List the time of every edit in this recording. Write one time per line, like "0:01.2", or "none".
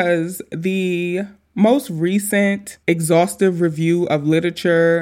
0:02.8